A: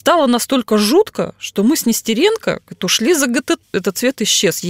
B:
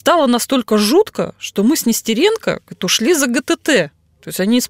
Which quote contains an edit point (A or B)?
A